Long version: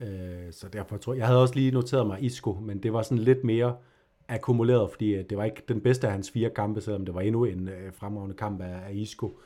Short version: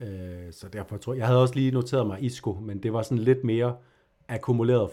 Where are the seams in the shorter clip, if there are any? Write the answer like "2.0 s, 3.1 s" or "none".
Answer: none